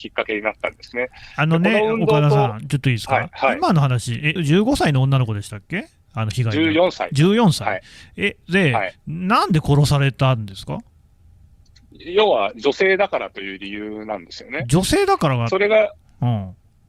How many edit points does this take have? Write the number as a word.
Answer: one